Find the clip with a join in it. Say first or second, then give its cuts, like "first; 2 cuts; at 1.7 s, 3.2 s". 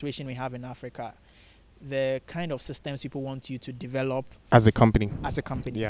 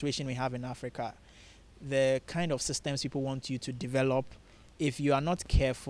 first; 1 cut; at 4.5 s